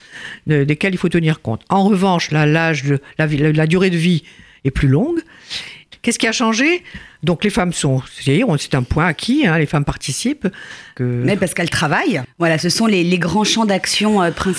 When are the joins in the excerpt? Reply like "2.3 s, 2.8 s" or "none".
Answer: 5.9 s, 11.0 s, 12.2 s